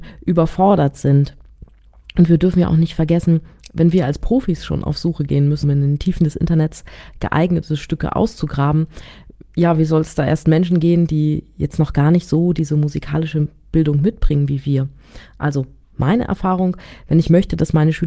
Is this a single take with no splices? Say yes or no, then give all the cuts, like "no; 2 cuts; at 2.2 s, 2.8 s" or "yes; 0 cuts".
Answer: no; 1 cut; at 5.6 s